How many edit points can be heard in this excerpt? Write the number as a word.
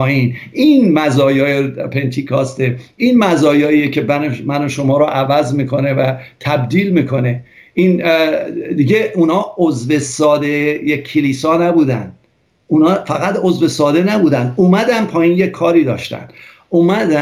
zero